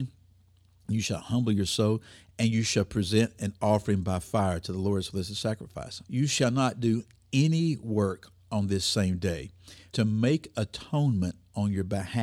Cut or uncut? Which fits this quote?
cut